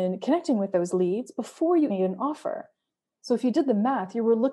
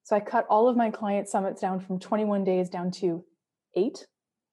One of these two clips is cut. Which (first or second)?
first